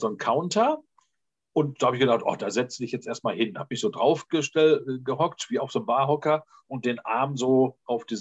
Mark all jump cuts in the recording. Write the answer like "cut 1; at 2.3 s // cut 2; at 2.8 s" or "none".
none